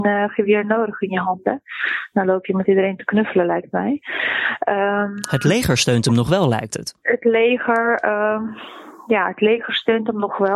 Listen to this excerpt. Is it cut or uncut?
uncut